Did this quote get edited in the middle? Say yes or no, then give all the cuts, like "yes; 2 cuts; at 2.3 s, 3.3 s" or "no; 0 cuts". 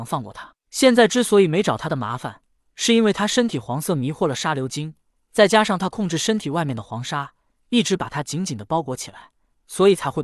no; 0 cuts